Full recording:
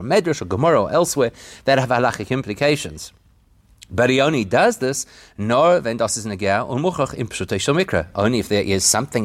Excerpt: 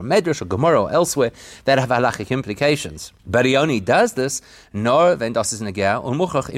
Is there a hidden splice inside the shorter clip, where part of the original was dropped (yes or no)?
yes